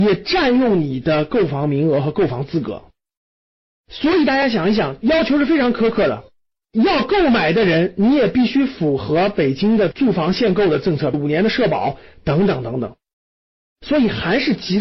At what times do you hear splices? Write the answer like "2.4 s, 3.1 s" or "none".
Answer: 11.1 s